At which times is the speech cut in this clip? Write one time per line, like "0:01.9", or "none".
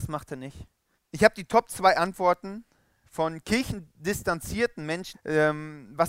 0:00.9
0:05.1

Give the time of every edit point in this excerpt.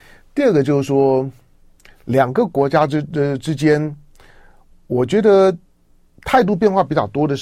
none

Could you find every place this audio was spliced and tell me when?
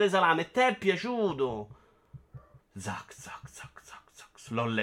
0:02.6

